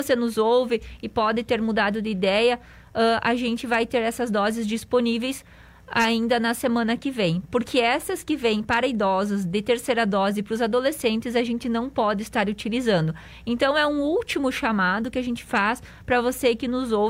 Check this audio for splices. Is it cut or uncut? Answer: uncut